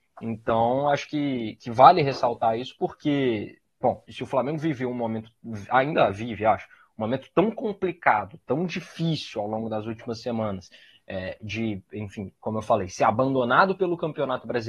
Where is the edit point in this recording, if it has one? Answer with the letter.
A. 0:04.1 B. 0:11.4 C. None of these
A